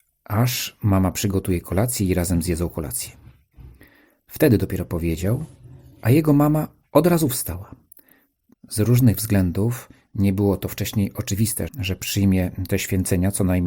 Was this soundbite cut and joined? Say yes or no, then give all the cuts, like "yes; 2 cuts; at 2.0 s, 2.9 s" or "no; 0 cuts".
yes; 2 cuts; at 8.5 s, 11.7 s